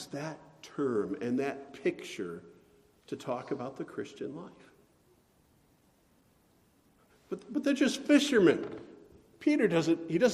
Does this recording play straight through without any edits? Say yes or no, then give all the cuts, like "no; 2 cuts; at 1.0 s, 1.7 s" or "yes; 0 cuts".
yes; 0 cuts